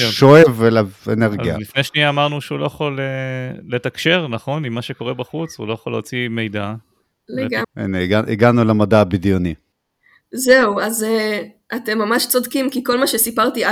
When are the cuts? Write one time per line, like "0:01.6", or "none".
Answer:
0:07.6